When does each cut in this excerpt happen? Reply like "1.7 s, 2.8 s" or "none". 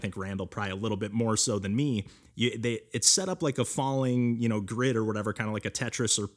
2.3 s

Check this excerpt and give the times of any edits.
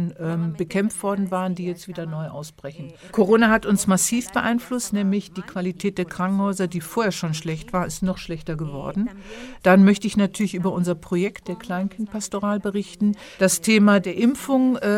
3.1 s, 9.6 s, 13.4 s

